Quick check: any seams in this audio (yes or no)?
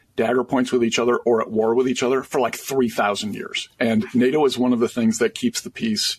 no